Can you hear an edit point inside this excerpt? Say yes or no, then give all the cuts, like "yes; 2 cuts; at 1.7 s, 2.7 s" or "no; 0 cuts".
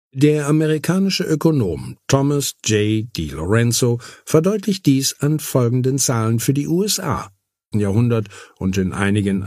yes; 1 cut; at 7.7 s